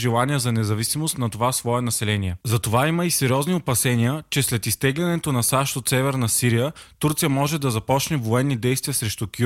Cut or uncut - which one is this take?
uncut